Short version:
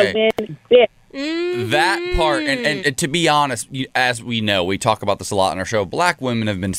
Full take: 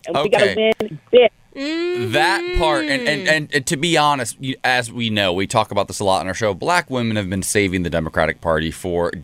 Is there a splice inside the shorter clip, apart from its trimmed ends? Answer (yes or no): yes